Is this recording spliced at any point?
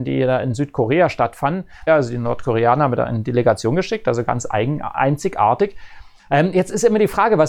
yes; 2 cuts; at 1.9 s, 6.2 s

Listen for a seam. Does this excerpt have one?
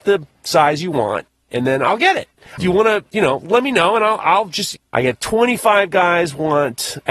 yes; 2 cuts; at 2.6 s, 4.8 s

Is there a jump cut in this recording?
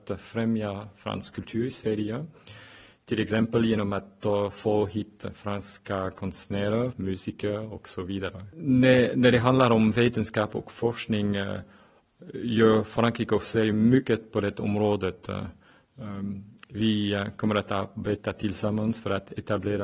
yes; 1 cut; at 6.9 s

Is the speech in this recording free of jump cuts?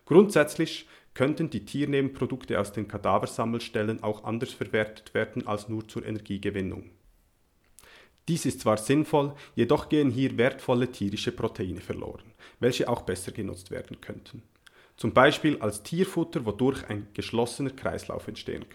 yes; 0 cuts

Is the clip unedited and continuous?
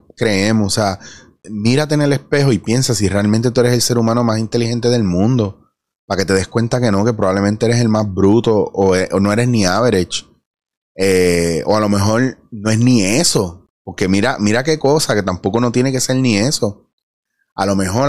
no; 1 cut; at 1.4 s

